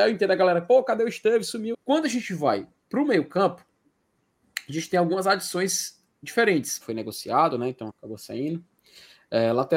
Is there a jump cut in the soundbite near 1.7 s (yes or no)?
yes